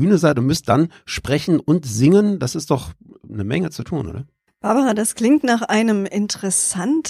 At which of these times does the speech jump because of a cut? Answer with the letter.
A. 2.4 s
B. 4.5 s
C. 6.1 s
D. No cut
B